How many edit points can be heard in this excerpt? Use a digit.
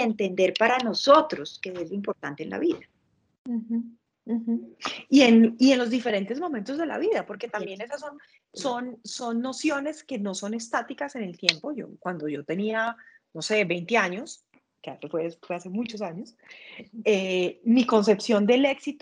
0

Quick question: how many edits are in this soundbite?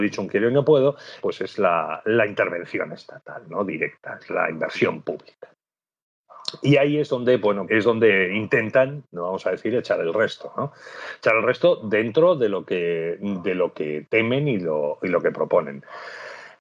2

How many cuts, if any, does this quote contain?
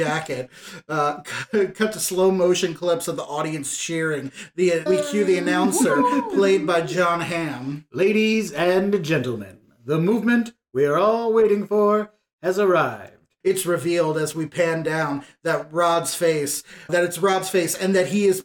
3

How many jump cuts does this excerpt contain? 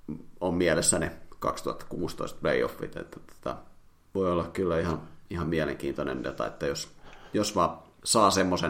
0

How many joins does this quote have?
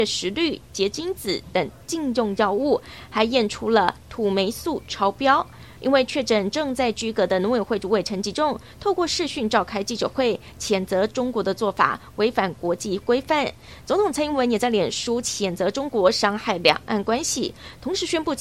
1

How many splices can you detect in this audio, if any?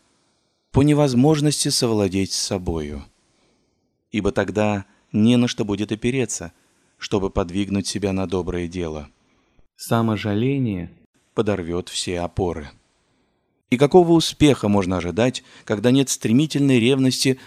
1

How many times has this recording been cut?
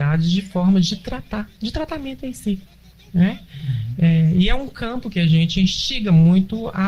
0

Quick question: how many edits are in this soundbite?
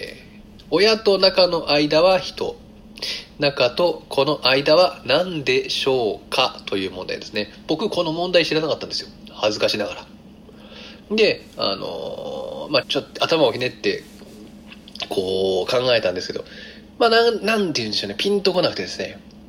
2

